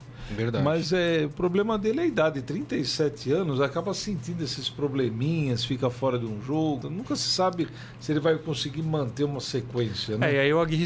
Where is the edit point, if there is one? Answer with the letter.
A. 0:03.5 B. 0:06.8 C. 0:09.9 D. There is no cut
B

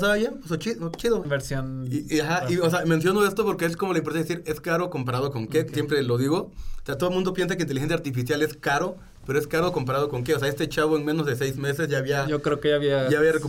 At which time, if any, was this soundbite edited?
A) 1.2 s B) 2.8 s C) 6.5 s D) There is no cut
A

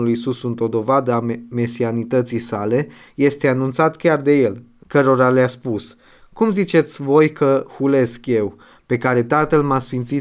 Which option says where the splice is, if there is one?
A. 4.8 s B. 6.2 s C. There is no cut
A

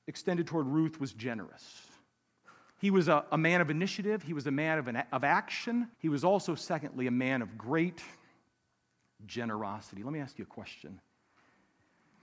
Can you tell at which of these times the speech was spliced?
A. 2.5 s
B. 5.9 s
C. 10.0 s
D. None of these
B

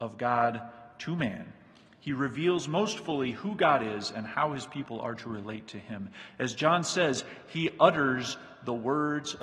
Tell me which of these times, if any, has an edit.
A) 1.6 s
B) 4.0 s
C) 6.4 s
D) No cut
D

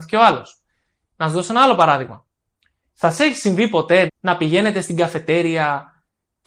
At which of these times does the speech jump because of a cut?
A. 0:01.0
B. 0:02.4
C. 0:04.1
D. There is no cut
C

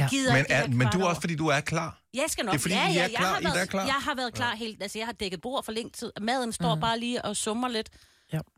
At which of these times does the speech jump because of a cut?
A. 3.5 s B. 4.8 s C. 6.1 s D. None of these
A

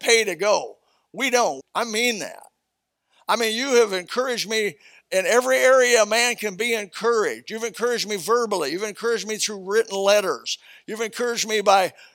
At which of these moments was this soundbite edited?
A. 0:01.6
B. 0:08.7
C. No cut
A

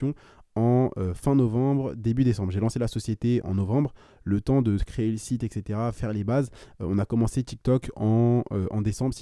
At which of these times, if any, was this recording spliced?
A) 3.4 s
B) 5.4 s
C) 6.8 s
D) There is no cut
A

